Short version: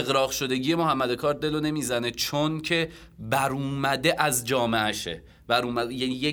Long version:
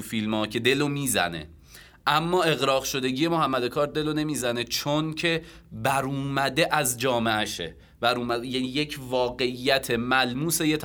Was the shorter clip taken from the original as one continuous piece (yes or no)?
yes